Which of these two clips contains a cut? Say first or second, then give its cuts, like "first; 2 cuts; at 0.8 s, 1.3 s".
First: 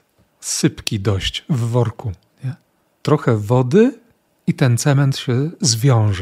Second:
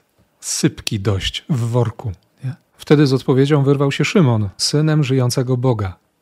second; 2 cuts; at 2.7 s, 4.6 s